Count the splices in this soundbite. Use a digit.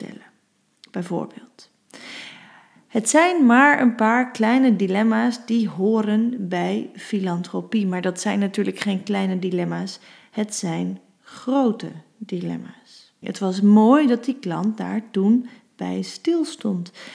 1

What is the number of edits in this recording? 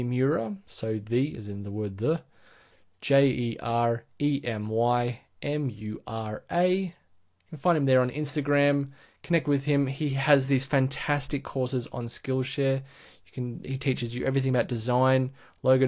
0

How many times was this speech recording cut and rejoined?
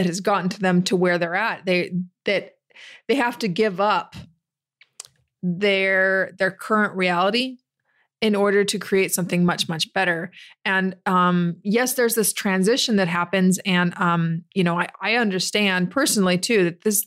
0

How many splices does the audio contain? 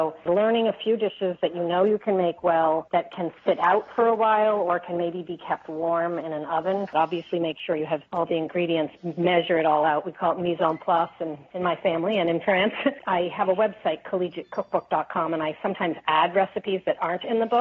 2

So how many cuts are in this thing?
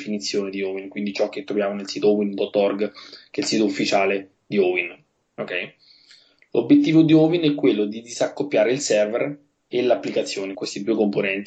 2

